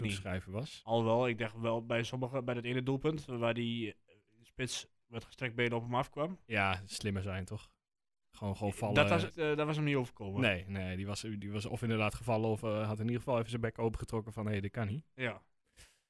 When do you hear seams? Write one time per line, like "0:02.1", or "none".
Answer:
0:09.3